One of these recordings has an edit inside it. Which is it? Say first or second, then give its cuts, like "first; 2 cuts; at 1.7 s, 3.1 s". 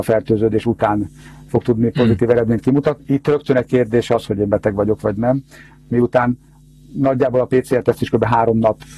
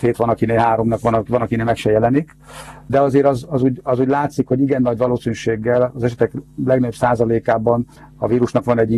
first; 2 cuts; at 3.0 s, 4.3 s